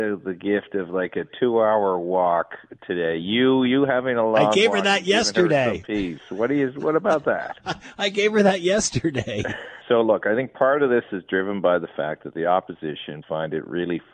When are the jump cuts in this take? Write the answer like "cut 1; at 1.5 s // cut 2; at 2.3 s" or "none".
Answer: cut 1; at 9.8 s // cut 2; at 13.2 s